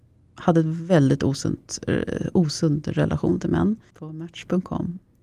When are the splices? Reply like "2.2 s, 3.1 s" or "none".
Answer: 3.9 s